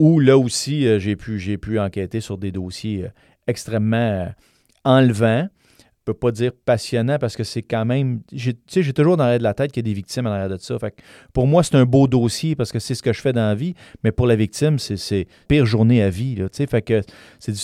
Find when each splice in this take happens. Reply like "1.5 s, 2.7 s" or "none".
none